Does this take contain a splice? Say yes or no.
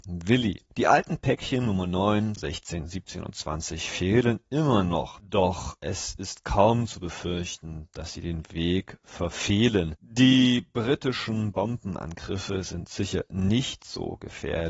yes